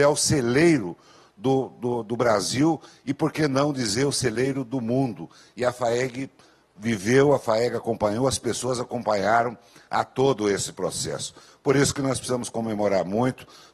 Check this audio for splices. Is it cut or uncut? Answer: uncut